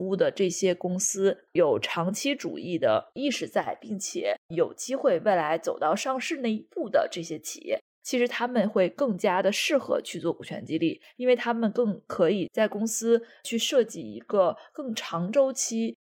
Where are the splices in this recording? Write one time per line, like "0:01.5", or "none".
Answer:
0:01.5